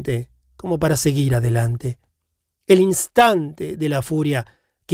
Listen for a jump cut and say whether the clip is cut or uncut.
uncut